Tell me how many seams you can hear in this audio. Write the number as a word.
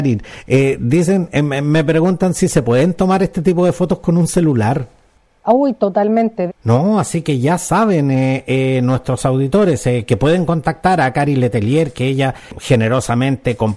one